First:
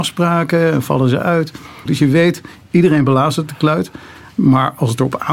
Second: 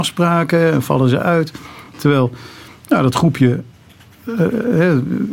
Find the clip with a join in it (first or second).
first